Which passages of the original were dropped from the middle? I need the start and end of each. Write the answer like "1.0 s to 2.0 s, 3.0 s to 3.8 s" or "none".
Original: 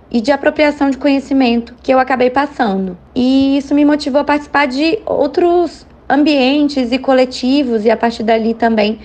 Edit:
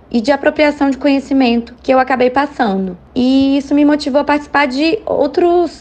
none